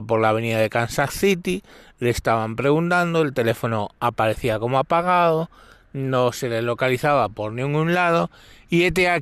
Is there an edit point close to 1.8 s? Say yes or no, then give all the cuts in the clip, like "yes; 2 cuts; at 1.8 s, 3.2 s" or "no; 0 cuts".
no; 0 cuts